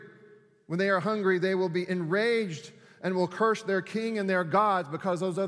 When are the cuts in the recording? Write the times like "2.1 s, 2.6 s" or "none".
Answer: none